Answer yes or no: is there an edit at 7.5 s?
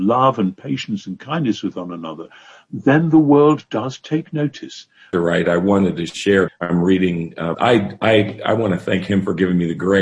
yes